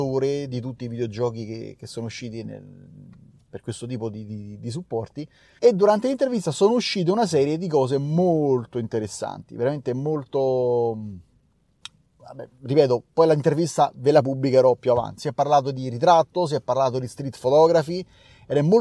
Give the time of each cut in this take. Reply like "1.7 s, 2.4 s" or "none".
5.6 s, 15.2 s